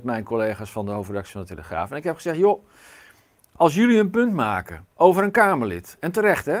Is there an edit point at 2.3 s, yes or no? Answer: no